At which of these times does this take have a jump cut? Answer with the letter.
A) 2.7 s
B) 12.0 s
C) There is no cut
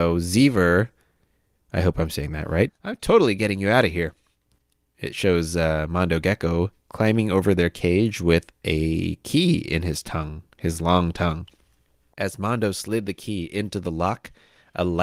A